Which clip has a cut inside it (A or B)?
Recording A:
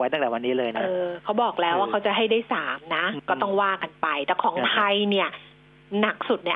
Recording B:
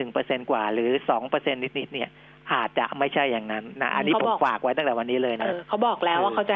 B